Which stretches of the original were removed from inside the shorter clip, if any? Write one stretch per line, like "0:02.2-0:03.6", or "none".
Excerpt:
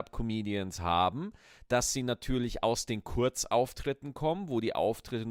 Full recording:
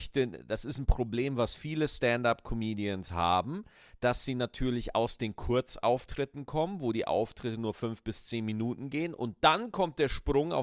none